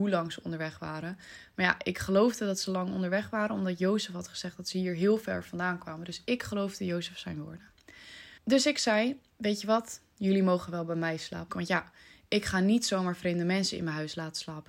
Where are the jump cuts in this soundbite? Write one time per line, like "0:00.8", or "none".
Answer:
0:08.4
0:11.5